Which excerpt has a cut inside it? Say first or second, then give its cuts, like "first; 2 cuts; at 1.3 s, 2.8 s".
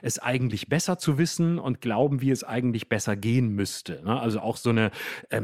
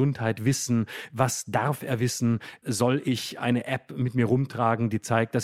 second; 1 cut; at 2.6 s